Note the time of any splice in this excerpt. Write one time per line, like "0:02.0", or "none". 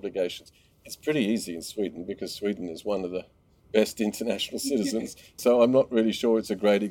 0:05.4